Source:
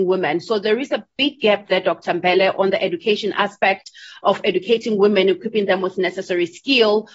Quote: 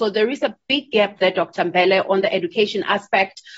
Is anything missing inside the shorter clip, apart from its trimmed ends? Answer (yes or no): no